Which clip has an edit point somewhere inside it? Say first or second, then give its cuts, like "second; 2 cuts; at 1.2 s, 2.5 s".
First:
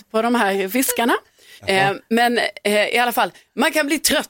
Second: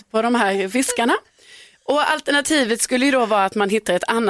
first; 1 cut; at 1.6 s